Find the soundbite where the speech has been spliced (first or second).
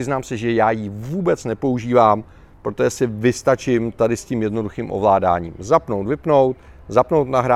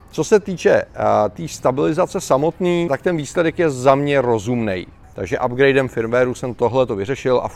second